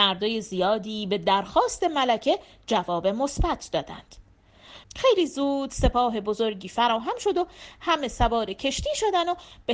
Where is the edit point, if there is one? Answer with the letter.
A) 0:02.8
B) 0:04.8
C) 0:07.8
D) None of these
B